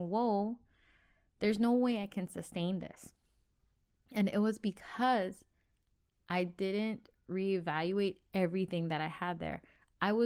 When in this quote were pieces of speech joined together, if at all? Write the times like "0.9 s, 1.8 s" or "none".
none